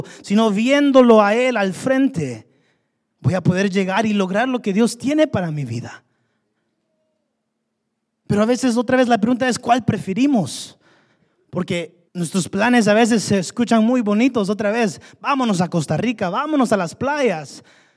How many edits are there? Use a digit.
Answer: 1